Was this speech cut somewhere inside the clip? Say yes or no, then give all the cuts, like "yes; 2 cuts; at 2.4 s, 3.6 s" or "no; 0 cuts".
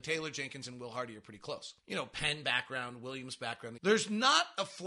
yes; 2 cuts; at 1.8 s, 3.8 s